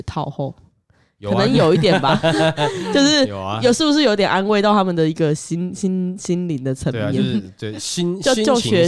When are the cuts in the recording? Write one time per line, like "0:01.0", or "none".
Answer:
none